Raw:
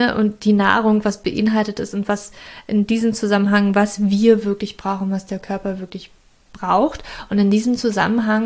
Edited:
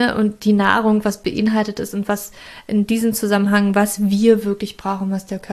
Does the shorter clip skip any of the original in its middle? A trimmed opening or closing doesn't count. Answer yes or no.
no